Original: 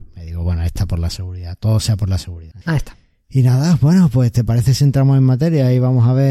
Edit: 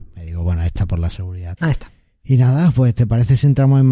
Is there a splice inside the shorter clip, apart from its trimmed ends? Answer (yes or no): yes